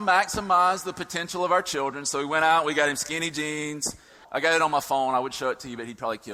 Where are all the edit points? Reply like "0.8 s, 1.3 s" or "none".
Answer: 4.2 s